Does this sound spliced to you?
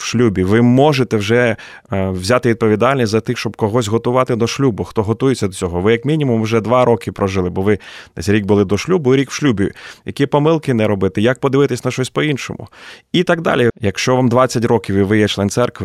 yes; 1 cut; at 13.7 s

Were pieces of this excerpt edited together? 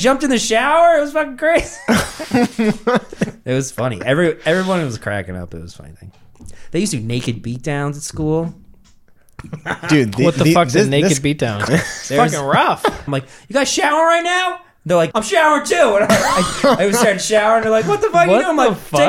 yes; 3 cuts; at 11.7 s, 13.1 s, 15.1 s

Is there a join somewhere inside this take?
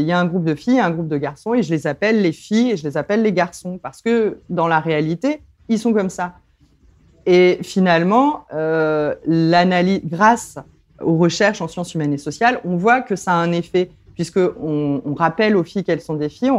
no; 0 cuts

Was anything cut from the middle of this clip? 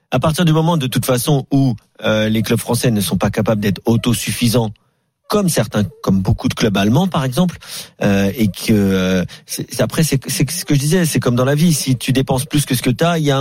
no; 0 cuts

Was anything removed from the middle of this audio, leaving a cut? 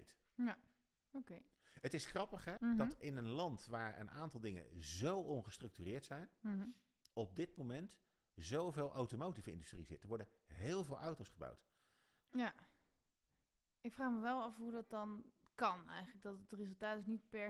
yes; 2 cuts; at 2.6 s, 12.2 s

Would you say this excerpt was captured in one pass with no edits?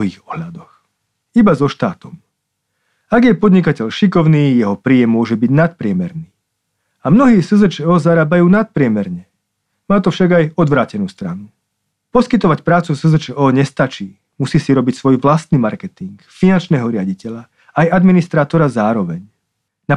no; 1 cut; at 1.2 s

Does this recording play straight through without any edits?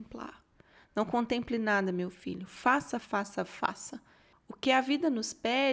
no; 2 cuts; at 3.0 s, 4.3 s

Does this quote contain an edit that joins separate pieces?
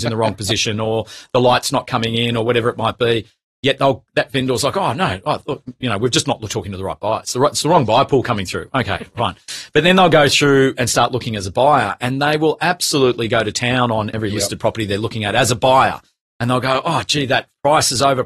yes; 1 cut; at 4.1 s

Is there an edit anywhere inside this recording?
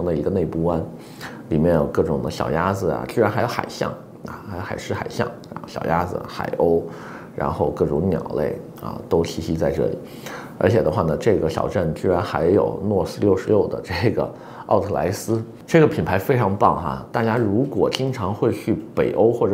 no; 0 cuts

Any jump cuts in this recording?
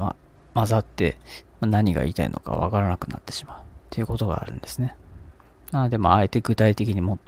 yes; 1 cut; at 3.8 s

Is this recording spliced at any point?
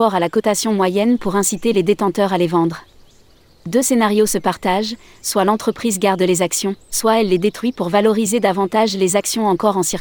yes; 1 cut; at 6.9 s

